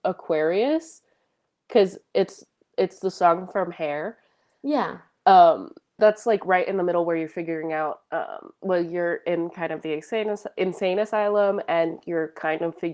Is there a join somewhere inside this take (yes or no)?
yes